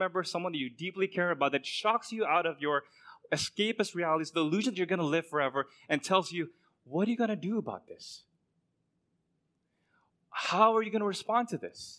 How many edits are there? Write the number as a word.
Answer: zero